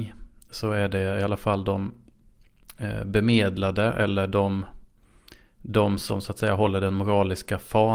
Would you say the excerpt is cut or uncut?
uncut